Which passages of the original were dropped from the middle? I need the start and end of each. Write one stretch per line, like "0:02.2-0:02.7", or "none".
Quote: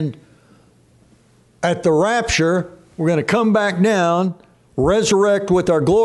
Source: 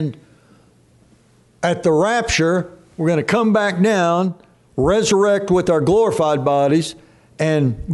none